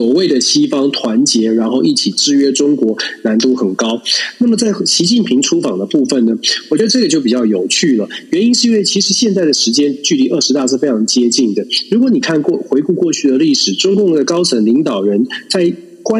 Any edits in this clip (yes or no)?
no